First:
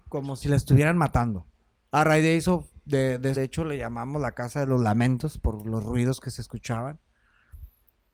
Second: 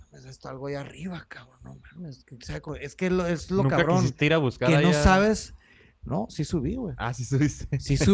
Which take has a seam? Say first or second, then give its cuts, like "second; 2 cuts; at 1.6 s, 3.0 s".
first; 2 cuts; at 1.8 s, 3.3 s